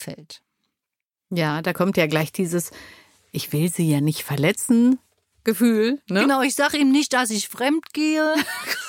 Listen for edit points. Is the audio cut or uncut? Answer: uncut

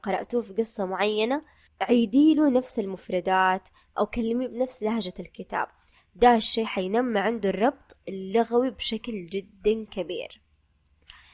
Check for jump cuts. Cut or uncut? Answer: uncut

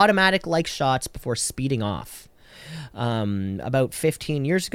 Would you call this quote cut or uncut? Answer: uncut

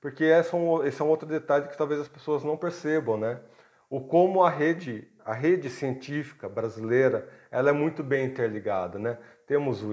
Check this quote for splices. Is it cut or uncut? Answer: uncut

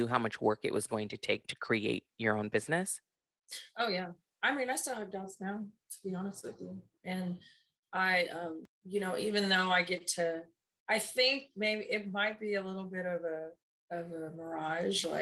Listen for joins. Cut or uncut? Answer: uncut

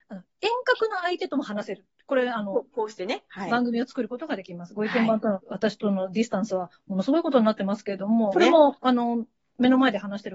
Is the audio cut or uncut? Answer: cut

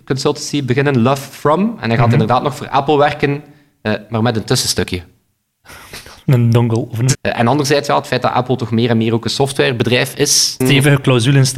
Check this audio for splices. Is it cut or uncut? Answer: cut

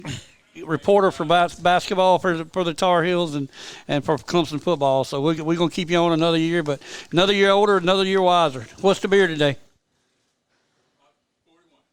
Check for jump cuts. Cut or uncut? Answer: uncut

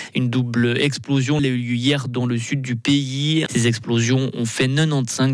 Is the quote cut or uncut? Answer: cut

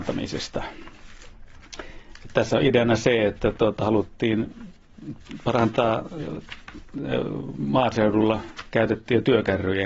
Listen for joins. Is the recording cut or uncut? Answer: uncut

